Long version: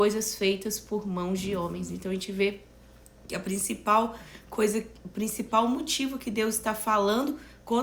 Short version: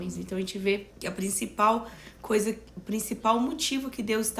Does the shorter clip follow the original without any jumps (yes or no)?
no